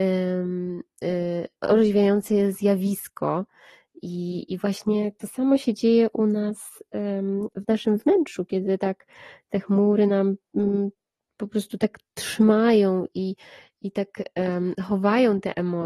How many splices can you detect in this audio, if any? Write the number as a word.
zero